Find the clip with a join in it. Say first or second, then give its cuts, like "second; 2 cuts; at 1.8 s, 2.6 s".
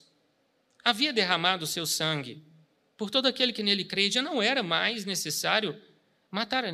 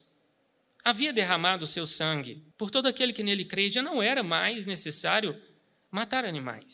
second; 1 cut; at 2.5 s